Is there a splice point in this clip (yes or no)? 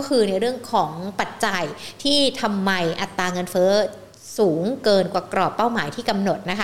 no